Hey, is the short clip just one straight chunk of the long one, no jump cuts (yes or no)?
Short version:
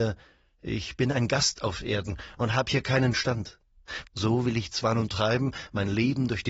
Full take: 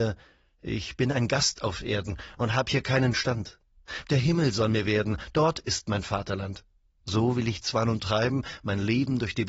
no